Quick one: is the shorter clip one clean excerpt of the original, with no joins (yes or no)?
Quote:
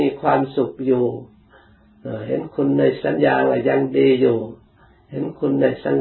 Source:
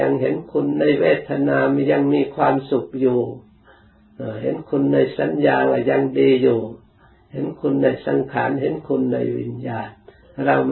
no